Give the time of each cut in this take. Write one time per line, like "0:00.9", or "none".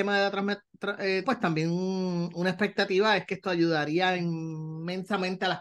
0:01.2